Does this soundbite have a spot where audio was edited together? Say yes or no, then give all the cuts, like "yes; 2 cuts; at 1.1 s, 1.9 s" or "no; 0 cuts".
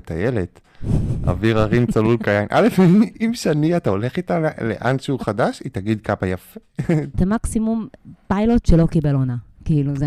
yes; 1 cut; at 7.1 s